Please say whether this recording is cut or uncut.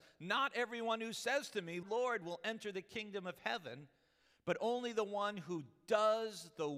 cut